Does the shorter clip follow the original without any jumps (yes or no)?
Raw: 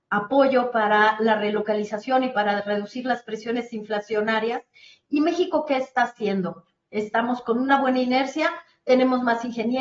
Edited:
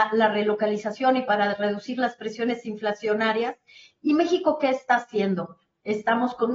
yes